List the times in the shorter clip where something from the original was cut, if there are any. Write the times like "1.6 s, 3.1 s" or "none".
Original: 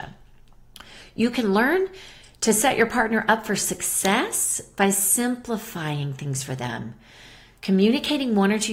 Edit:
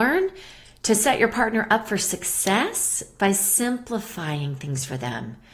none